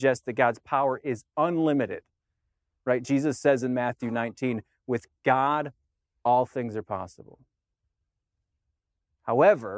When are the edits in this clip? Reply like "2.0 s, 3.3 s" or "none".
none